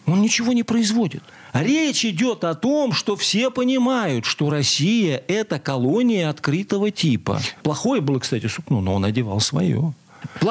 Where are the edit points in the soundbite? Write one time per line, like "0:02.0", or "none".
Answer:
0:07.6